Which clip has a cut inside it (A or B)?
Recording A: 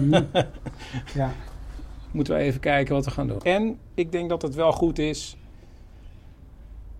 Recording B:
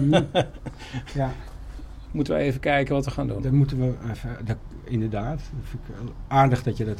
A